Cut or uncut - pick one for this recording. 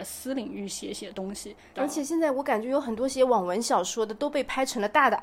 cut